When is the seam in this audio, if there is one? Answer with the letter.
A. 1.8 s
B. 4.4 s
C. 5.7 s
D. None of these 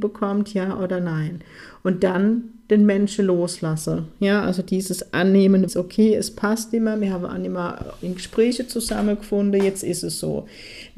C